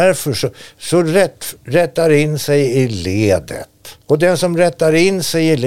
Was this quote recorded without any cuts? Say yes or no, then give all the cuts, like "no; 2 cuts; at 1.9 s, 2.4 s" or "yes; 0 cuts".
no; 2 cuts; at 1.6 s, 4.0 s